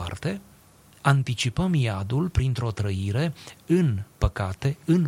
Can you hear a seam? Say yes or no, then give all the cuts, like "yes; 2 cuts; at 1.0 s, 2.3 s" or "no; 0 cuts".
no; 0 cuts